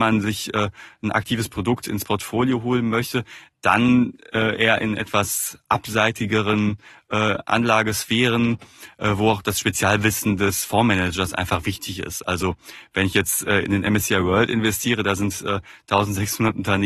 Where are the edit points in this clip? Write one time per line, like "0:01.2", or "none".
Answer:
none